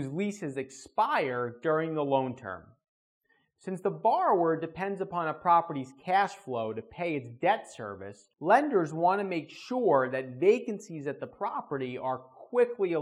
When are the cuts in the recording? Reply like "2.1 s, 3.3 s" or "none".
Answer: 8.3 s